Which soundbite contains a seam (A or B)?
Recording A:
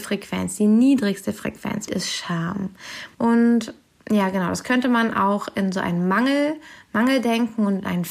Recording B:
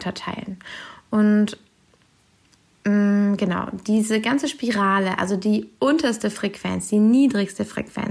A